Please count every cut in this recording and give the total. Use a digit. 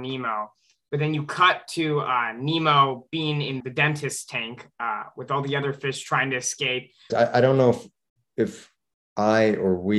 2